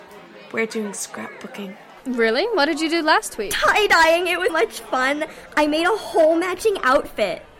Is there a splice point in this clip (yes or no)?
yes